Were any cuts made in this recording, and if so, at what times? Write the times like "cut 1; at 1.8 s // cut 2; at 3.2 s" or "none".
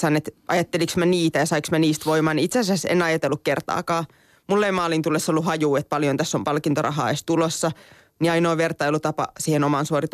cut 1; at 8.2 s